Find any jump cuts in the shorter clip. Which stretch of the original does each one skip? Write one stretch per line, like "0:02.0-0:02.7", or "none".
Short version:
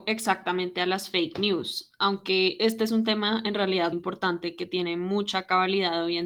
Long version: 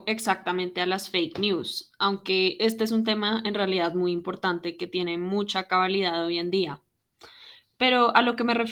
0:03.9-0:04.1